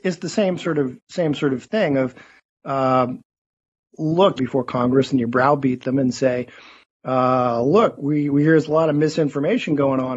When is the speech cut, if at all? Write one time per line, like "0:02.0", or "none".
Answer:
0:04.4